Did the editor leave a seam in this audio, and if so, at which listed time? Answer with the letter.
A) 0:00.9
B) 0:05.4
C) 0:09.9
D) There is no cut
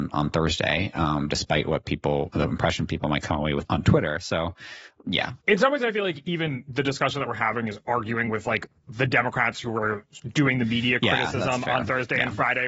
B